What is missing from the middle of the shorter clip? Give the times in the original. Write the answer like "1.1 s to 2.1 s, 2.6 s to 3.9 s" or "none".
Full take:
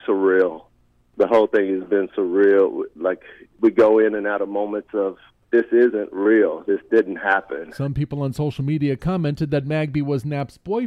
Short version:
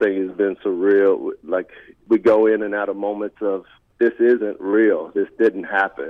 none